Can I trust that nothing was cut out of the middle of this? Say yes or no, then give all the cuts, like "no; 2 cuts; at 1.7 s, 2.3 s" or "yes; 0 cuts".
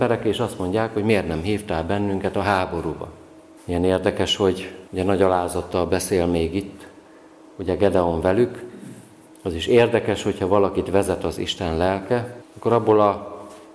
no; 3 cuts; at 3.6 s, 4.9 s, 12.4 s